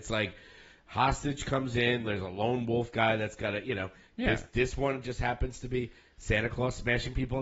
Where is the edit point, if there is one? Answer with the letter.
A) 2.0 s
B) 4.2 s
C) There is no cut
A